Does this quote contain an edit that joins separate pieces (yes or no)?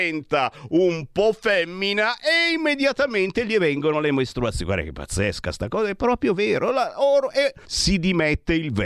yes